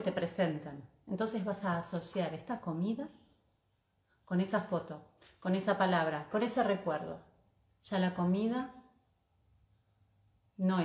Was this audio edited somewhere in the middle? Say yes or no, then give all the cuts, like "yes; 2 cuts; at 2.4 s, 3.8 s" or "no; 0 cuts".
yes; 1 cut; at 6.3 s